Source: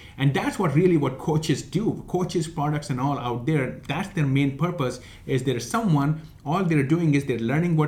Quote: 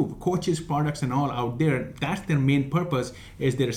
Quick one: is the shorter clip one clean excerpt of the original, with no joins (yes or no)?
yes